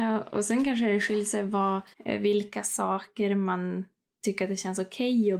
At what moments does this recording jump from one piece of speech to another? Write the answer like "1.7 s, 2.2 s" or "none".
1.9 s